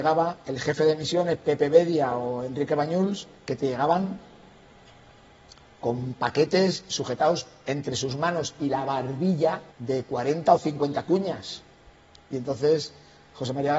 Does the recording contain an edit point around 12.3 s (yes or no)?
no